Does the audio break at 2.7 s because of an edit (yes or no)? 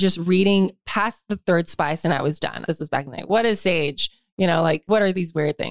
yes